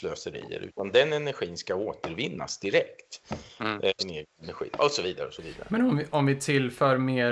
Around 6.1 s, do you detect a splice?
no; 1 cut; at 4.0 s

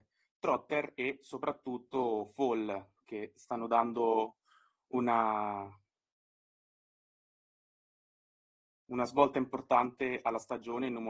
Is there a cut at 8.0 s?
no; 0 cuts

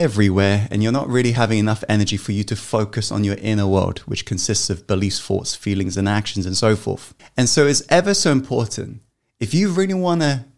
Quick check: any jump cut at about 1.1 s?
no; 1 cut; at 7.2 s

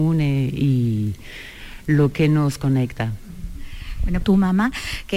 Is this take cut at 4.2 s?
yes; 1 cut; at 4.2 s

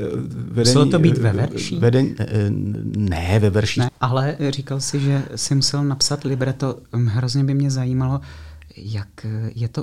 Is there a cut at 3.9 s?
yes; 1 cut; at 3.9 s

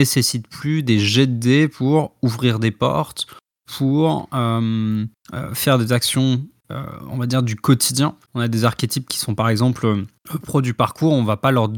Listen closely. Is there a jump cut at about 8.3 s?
yes; 1 cut; at 8.3 s

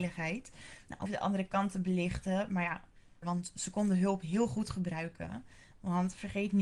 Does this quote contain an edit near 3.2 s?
yes; 2 cuts; at 1.1 s, 3.2 s

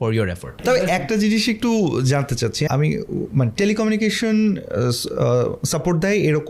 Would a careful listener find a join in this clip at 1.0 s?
yes; 2 cuts; at 1.0 s, 2.7 s

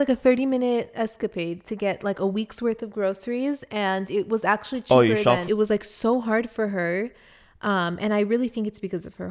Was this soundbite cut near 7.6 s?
no; 1 cut; at 5.4 s

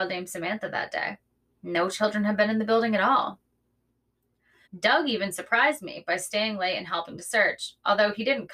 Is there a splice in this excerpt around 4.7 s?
yes; 1 cut; at 4.7 s

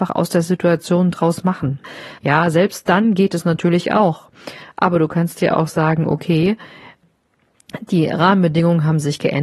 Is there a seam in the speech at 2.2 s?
yes; 1 cut; at 2.2 s

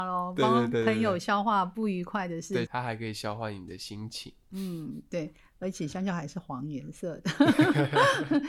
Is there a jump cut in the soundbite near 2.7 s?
yes; 1 cut; at 2.7 s

